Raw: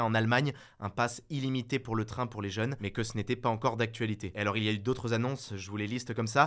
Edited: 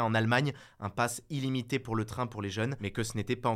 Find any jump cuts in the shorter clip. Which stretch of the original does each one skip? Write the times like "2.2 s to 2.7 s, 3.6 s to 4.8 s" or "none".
none